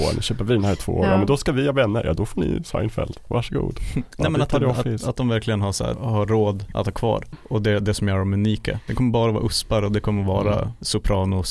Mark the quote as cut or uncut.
cut